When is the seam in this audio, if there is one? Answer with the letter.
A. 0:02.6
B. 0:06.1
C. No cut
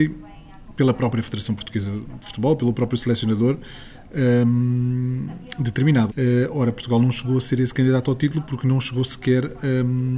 B